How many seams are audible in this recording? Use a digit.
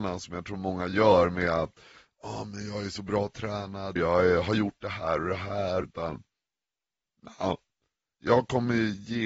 3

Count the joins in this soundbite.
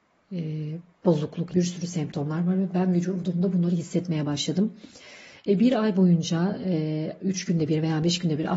1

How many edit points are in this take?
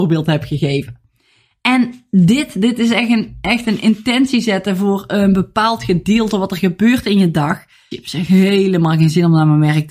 1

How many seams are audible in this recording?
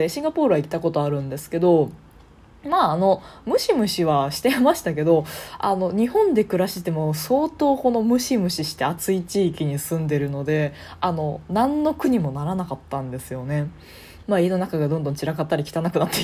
1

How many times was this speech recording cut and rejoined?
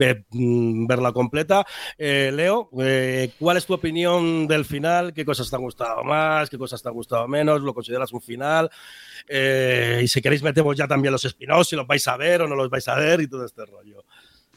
0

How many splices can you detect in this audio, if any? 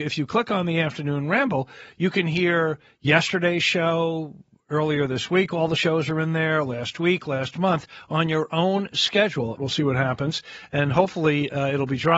1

